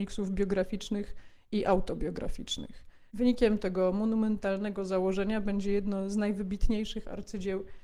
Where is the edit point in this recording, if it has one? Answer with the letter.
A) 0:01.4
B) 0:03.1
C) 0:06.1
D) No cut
B